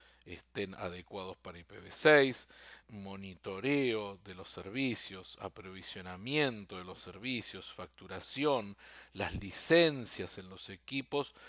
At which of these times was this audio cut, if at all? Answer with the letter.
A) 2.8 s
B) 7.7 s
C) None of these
A